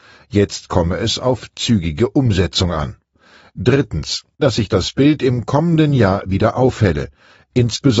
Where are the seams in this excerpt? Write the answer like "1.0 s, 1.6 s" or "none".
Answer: 4.4 s